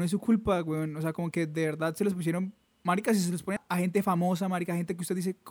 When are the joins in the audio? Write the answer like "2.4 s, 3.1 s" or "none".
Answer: 3.6 s